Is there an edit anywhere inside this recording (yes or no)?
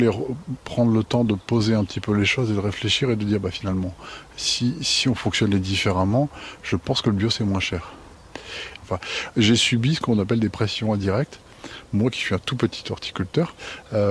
yes